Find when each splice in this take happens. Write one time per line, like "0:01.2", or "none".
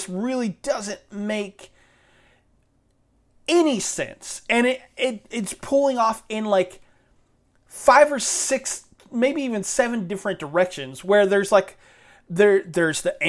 none